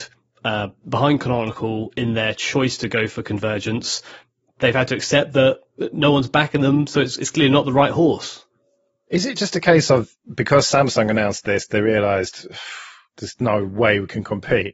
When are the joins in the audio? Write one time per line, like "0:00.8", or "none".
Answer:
none